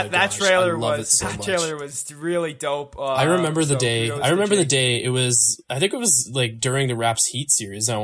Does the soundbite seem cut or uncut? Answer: uncut